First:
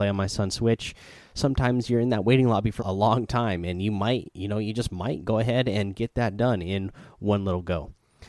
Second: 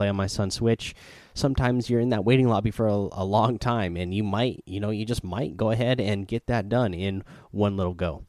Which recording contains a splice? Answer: first; 1 cut; at 2.8 s

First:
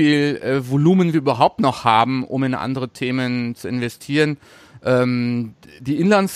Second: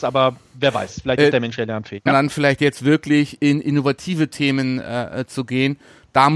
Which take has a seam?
second; 1 cut; at 2.1 s

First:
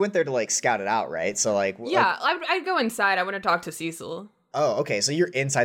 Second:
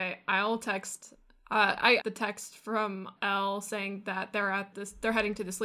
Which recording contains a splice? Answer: second; 3 cuts; at 2.0 s, 3.2 s, 4.7 s

